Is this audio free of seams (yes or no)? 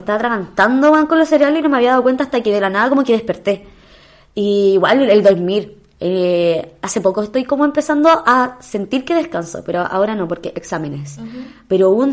yes